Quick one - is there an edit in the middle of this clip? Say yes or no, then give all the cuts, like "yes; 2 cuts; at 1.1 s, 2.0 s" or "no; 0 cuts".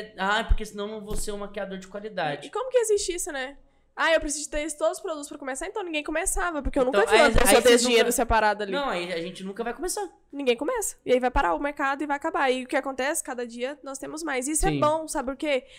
no; 0 cuts